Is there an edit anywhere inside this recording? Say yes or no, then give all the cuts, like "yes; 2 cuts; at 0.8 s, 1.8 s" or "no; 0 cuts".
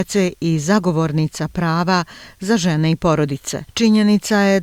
yes; 1 cut; at 3.7 s